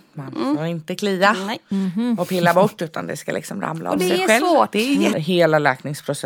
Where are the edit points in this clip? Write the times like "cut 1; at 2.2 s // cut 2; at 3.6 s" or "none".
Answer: cut 1; at 5.1 s